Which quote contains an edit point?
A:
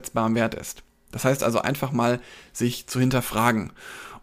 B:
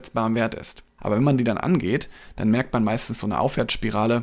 B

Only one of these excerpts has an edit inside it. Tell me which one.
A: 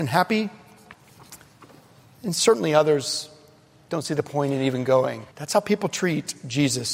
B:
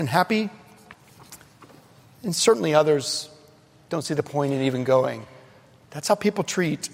A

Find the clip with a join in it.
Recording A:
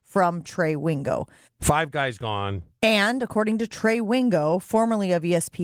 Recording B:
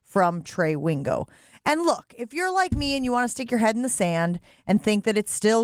A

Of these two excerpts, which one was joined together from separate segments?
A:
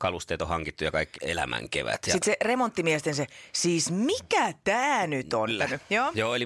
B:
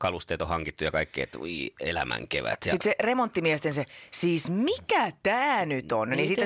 A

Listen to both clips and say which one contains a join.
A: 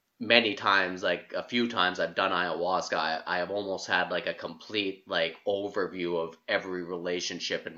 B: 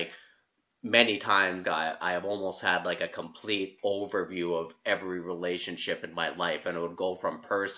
B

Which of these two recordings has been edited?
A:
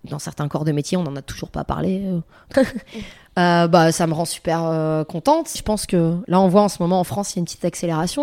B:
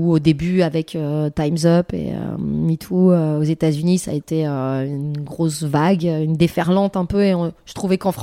A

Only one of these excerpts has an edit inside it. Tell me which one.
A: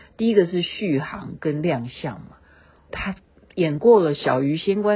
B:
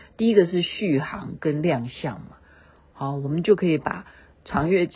A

